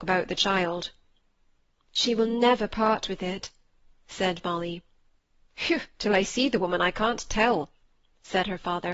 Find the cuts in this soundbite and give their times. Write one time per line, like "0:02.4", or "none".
none